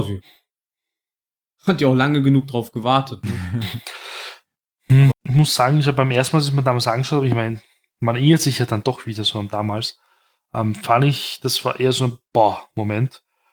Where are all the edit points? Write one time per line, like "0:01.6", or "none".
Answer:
0:05.1